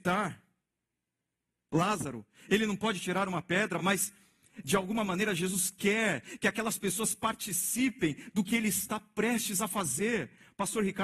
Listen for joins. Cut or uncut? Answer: uncut